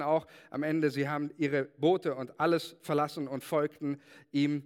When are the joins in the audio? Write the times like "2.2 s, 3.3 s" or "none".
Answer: none

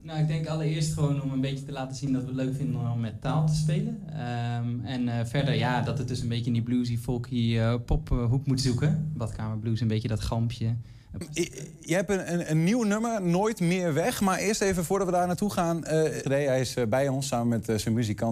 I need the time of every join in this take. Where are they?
11.2 s, 16.3 s

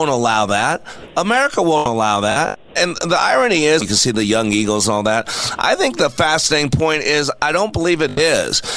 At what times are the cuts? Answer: 2.8 s, 3.8 s

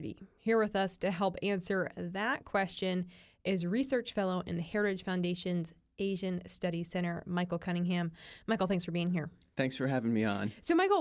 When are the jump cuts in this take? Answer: none

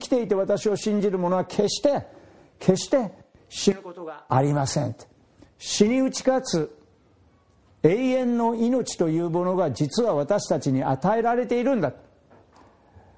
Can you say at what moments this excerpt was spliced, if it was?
5.5 s

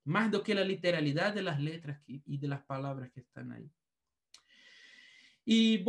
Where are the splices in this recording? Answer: none

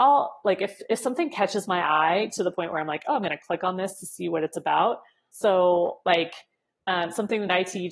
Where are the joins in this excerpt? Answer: 5.3 s

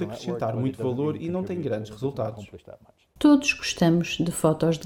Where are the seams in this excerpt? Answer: 3.2 s

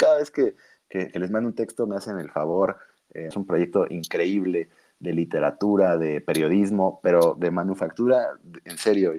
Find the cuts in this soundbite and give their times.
3.3 s

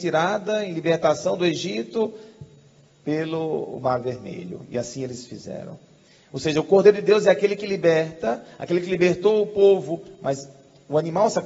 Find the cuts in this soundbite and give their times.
none

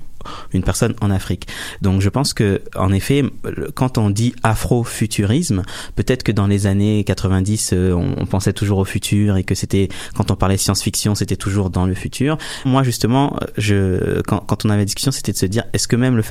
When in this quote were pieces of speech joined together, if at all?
12.6 s

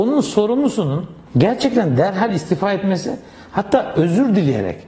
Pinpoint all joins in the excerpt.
1.3 s

